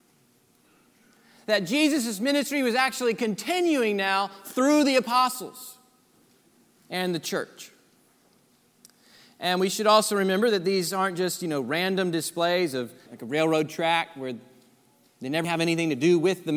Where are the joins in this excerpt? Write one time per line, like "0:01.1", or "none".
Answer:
0:13.1
0:15.4